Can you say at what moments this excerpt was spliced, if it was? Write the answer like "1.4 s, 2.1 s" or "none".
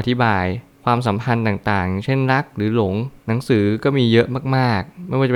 3.2 s